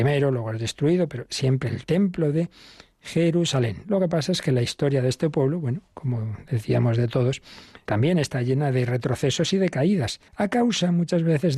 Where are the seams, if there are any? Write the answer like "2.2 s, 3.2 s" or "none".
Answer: 7.9 s, 10.3 s